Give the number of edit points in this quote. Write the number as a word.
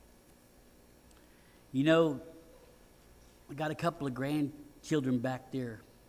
zero